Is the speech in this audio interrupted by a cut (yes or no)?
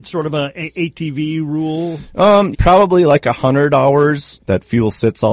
yes